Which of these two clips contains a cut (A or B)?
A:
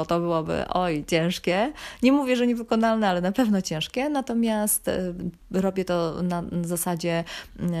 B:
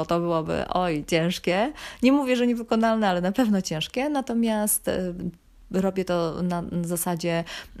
A